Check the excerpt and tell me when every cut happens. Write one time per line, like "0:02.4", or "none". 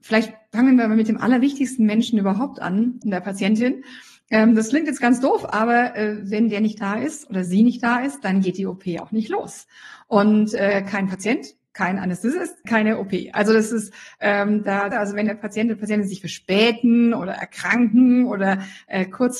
0:03.0
0:12.7
0:14.9